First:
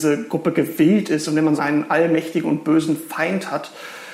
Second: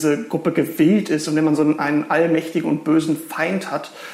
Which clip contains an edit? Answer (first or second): first